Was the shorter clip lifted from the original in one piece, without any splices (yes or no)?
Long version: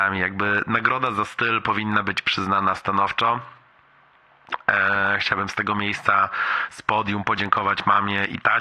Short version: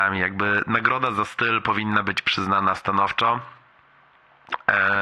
yes